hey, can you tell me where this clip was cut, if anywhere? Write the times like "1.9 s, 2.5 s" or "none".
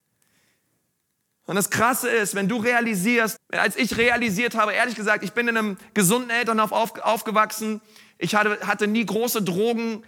3.4 s